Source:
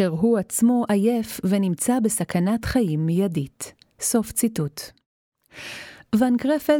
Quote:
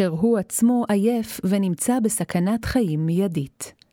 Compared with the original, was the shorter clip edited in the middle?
no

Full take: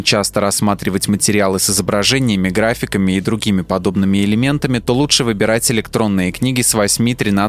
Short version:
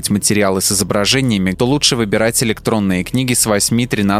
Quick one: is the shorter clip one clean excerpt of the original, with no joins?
no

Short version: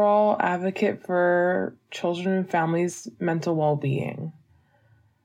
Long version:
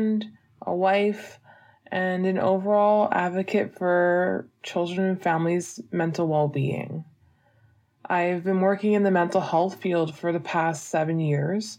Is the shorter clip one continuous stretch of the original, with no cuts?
yes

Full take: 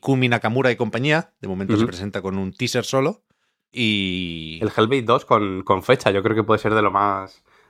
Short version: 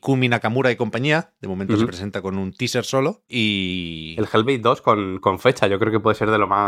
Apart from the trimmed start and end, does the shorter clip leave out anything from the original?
yes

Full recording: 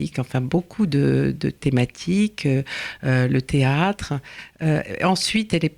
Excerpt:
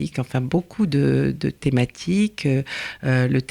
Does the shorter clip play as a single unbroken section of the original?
yes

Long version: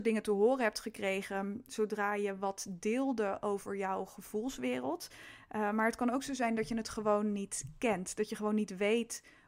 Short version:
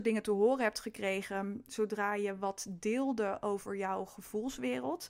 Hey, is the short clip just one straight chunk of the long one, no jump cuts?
yes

